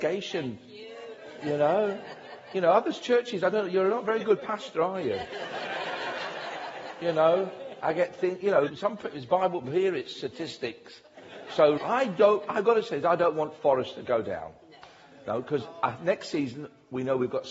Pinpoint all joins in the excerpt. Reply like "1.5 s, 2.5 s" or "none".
8.7 s, 11.8 s